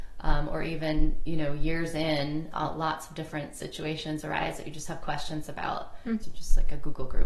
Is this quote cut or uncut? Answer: cut